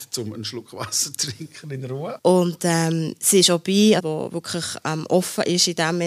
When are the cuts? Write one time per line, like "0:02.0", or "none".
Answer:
0:02.2
0:04.0

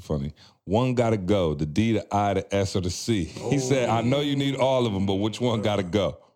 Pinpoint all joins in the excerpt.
none

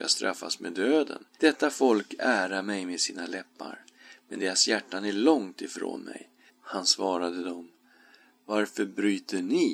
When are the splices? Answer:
0:01.3
0:06.5

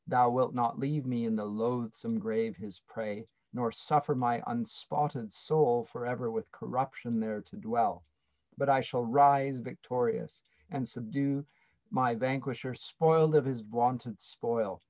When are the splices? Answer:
none

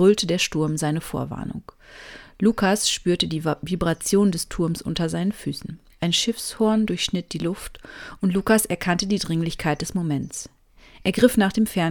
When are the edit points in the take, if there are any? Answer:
0:05.9

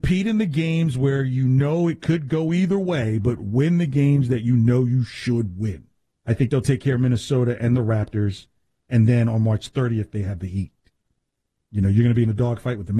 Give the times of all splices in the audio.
0:06.1
0:11.6

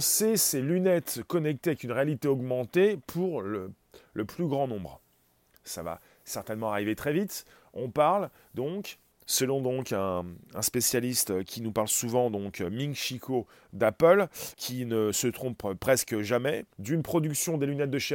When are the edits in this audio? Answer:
0:14.5
0:16.7

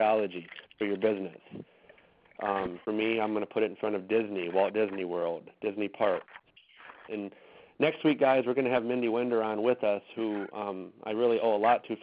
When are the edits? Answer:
0:07.1

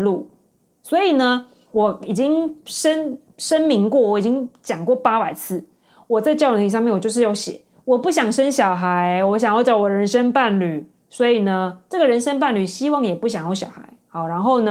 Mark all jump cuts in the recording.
none

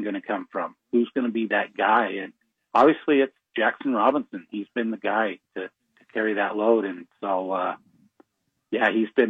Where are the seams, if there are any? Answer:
none

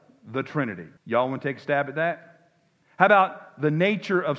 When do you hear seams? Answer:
0:01.0
0:02.8

